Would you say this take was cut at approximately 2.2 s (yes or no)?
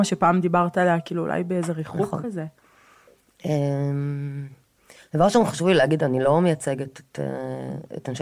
no